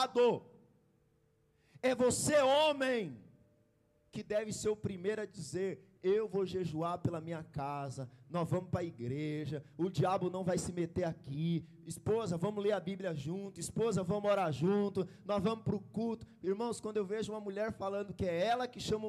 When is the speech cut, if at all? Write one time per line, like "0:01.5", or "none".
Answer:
none